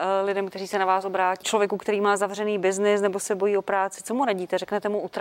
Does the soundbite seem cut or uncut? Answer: cut